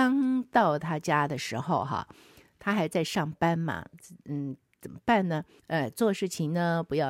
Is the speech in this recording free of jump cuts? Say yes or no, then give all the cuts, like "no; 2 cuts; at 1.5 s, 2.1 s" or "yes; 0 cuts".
no; 1 cut; at 5.6 s